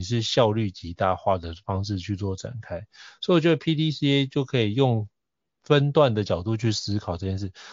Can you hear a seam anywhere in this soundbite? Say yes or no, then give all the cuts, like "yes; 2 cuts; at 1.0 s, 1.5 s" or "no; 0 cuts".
no; 0 cuts